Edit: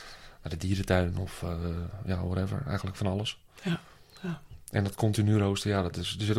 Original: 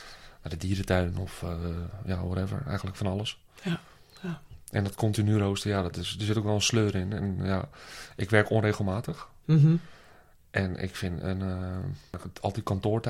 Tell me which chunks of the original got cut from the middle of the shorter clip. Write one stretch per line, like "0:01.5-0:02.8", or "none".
none